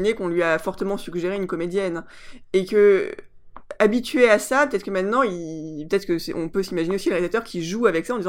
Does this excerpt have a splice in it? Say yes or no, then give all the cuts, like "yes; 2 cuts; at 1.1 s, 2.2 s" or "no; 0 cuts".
no; 0 cuts